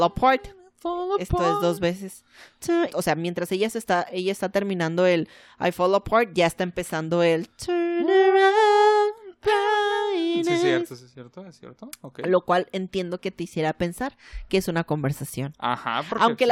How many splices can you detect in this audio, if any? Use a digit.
1